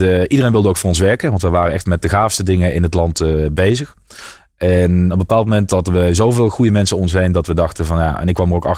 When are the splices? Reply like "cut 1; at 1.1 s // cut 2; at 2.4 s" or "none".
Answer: none